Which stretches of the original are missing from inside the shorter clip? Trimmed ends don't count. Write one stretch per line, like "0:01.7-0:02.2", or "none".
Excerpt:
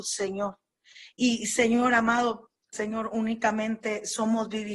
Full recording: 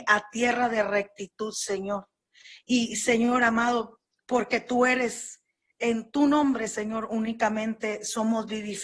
0:04.2-0:06.7